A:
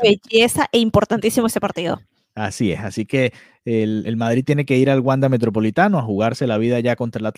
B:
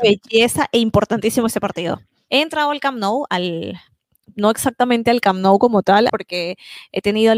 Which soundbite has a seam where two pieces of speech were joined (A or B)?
B